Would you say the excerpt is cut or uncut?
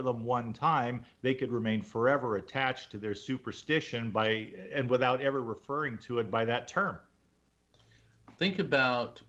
uncut